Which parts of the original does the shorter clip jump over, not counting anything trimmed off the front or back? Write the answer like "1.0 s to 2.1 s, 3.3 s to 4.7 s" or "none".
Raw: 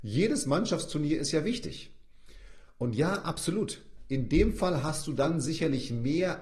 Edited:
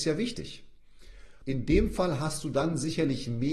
2.7 s to 4.0 s